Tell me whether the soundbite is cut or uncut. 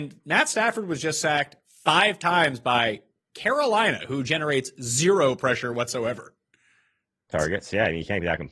cut